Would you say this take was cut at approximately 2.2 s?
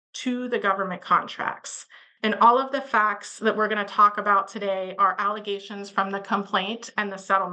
yes; 1 cut; at 2.2 s

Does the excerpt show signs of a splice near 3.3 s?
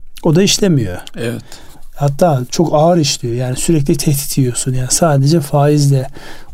no; 0 cuts

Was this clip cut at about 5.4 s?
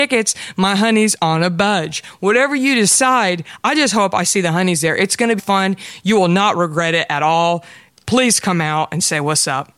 yes; 1 cut; at 5.4 s

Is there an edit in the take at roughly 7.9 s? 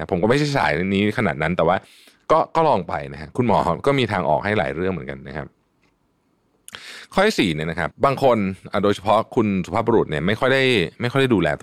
yes; 1 cut; at 7.9 s

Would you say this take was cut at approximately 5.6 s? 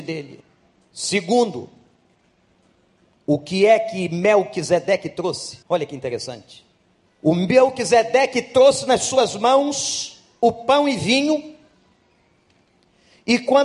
yes; 2 cuts; at 5.6 s, 7.1 s

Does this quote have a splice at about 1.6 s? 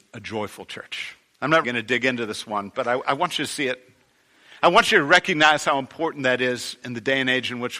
yes; 1 cut; at 1.6 s

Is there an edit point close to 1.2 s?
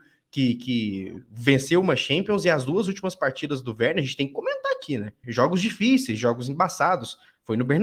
no; 1 cut; at 5.2 s

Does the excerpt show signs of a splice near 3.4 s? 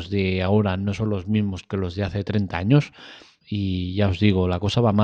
yes; 1 cut; at 3.4 s

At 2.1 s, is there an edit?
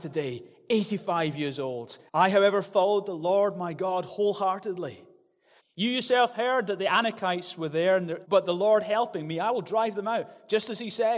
yes; 3 cuts; at 2.1 s, 5.6 s, 8.2 s

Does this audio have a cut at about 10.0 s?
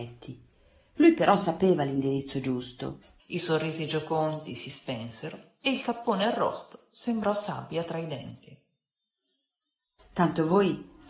yes; 2 cuts; at 3.2 s, 10.0 s

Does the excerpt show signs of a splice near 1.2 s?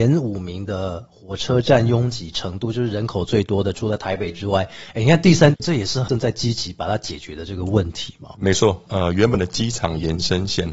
no; 2 cuts; at 5.5 s, 8.9 s

